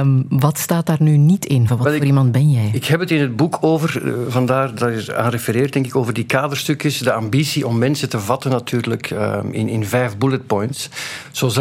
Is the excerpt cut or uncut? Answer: cut